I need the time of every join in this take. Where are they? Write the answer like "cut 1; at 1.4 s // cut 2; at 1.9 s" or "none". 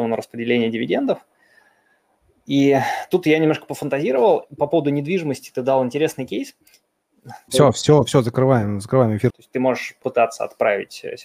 cut 1; at 7.5 s // cut 2; at 9.3 s